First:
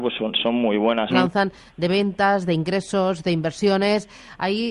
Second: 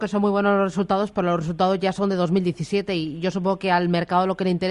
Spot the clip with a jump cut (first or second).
first